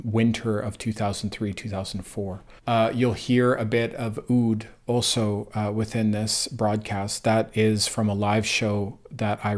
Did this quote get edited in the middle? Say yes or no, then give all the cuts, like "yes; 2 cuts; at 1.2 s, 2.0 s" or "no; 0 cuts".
yes; 1 cut; at 2.6 s